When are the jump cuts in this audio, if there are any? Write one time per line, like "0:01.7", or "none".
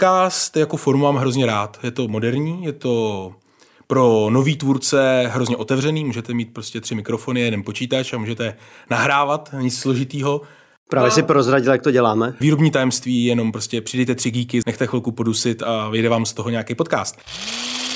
0:12.4
0:14.6